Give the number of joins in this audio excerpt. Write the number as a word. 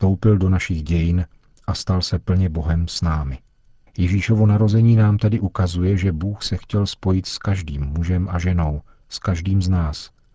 zero